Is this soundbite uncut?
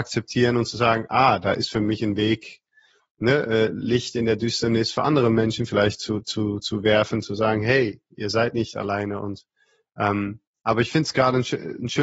yes; 0 cuts

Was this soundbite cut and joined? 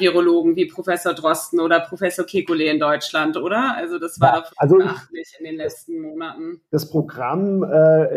yes; 2 cuts; at 4.5 s, 6.6 s

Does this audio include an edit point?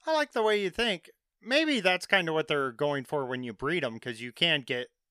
no; 0 cuts

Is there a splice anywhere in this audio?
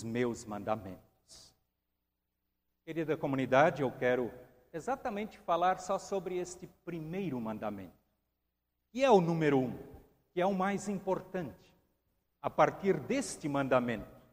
no; 0 cuts

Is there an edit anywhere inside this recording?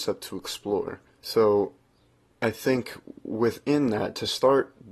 no; 0 cuts

